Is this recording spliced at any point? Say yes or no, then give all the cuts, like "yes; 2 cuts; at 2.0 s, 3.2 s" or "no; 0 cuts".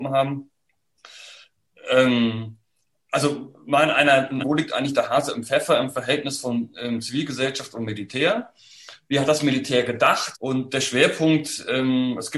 yes; 2 cuts; at 4.4 s, 10.3 s